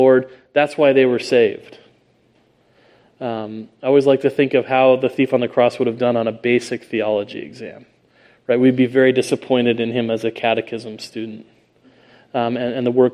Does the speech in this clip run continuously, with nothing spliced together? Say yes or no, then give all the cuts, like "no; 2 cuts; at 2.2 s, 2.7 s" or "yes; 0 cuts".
yes; 0 cuts